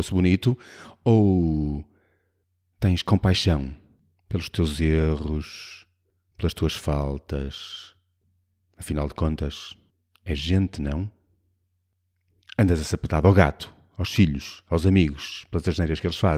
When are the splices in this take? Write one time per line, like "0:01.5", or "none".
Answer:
none